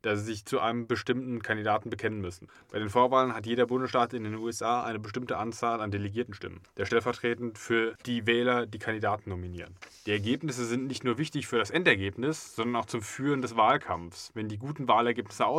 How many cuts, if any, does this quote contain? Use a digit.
0